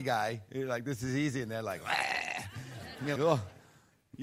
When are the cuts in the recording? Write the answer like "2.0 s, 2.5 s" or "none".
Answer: 3.2 s